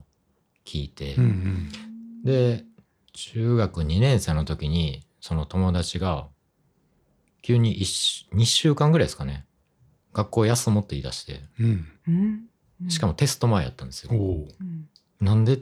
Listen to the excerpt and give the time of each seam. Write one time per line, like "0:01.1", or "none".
none